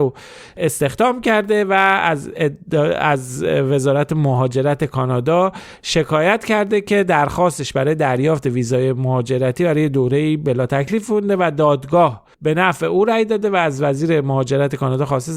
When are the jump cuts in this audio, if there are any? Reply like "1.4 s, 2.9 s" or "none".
12.3 s